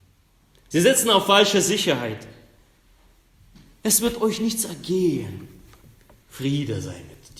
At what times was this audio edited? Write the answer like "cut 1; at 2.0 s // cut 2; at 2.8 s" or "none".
none